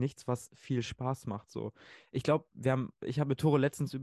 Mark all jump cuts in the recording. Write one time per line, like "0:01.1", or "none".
none